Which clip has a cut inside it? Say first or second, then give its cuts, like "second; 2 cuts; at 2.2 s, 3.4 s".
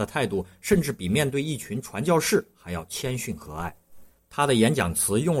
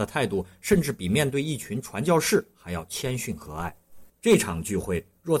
second; 1 cut; at 4.1 s